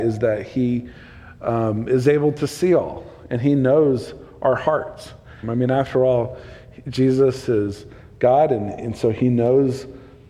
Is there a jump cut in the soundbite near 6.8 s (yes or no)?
no